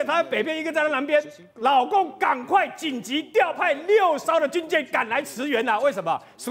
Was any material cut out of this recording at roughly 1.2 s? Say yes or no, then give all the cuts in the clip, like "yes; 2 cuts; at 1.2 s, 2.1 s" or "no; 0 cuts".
no; 0 cuts